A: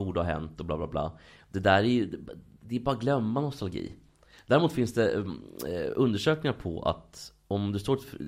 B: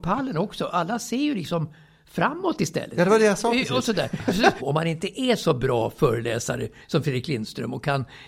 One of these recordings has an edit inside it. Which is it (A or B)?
B